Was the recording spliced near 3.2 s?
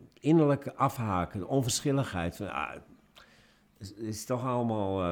no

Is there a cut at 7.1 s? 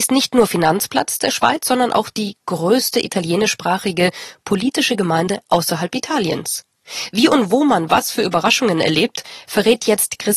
no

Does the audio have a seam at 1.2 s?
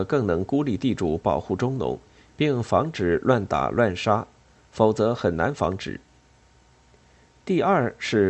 no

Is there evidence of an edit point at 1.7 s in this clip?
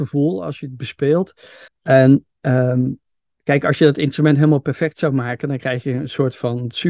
yes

